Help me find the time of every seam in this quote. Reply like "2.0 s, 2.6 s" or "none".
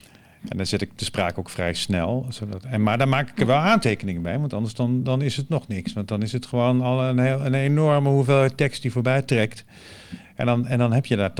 none